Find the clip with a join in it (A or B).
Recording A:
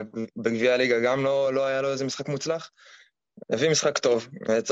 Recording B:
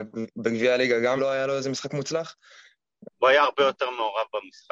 B